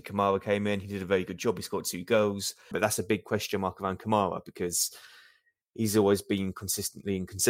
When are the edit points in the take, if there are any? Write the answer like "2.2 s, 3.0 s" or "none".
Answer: 2.7 s